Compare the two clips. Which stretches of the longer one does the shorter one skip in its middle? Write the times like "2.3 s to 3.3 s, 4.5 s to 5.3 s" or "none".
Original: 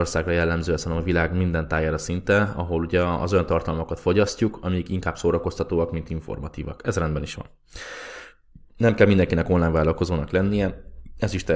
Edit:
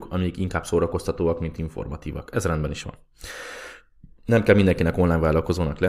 none